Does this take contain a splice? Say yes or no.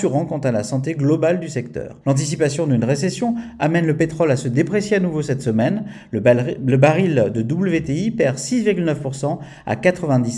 yes